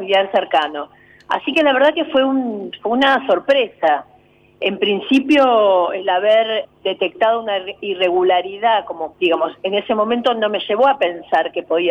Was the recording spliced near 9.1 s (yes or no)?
yes